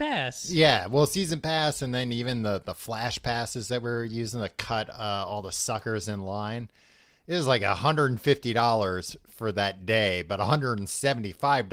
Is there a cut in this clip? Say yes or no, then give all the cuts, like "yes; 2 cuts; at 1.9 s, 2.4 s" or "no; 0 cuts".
no; 0 cuts